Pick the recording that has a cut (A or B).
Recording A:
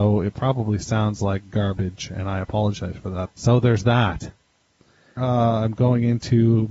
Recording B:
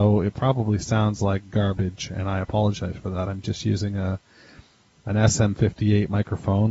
A